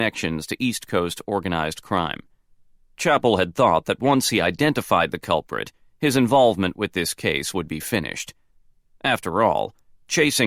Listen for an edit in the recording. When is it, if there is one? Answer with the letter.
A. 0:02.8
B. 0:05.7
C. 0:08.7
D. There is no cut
D